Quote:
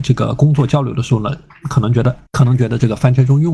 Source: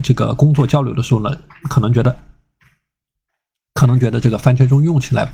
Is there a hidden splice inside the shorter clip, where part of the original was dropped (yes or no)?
yes